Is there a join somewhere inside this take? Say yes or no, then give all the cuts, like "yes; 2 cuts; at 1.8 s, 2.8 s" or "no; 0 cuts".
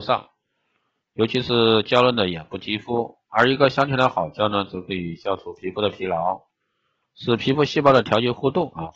no; 0 cuts